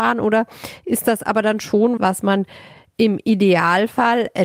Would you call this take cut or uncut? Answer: cut